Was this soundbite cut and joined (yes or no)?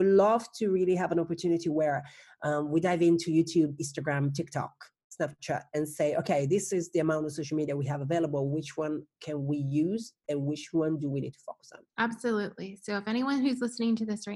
yes